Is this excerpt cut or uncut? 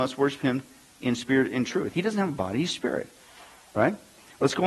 uncut